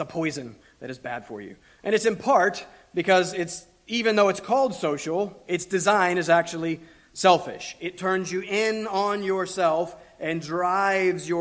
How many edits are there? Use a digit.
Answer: 0